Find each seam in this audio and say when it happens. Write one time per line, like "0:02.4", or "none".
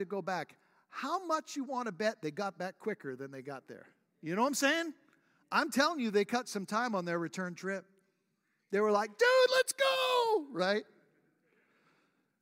none